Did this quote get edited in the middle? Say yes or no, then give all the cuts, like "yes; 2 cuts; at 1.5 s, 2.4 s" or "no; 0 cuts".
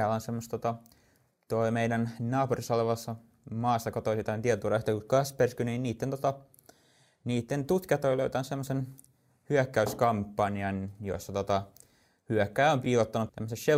yes; 1 cut; at 12.8 s